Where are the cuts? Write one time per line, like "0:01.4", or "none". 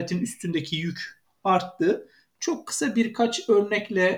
none

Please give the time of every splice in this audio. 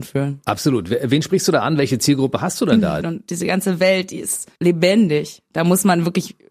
0:03.0
0:04.6

